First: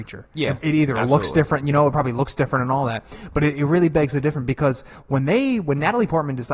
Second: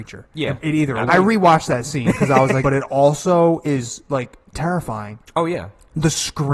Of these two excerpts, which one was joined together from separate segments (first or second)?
second